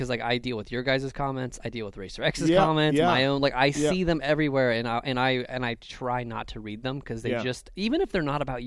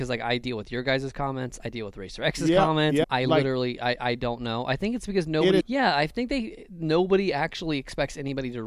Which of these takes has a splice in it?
second; 2 cuts; at 3.0 s, 5.6 s

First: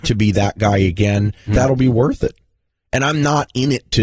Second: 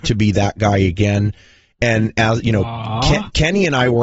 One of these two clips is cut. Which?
first; 1 cut; at 1.5 s

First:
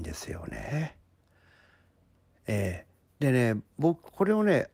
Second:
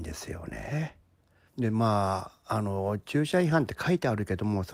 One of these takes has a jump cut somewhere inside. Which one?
second; 1 cut; at 1.5 s

